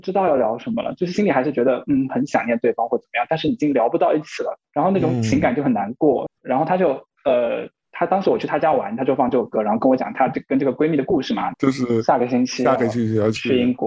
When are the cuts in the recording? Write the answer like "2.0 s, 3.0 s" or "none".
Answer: 6.3 s, 11.5 s

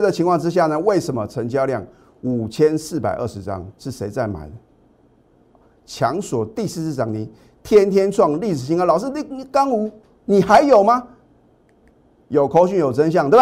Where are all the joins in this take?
none

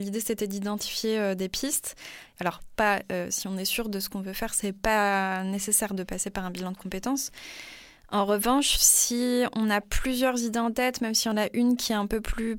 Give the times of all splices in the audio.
2.4 s

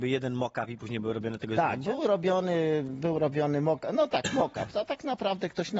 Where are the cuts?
none

